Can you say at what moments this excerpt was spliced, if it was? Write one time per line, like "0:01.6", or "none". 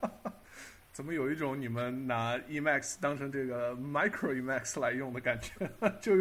none